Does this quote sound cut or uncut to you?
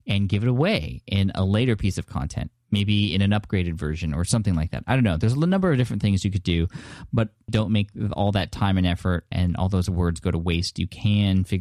cut